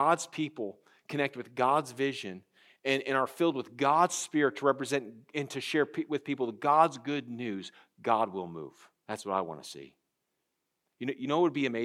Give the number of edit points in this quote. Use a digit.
1